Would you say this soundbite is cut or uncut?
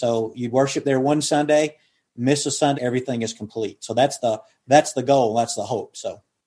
cut